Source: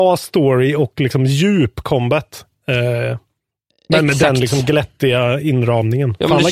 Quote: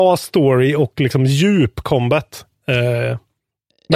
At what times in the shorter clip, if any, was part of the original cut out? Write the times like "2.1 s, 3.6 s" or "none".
none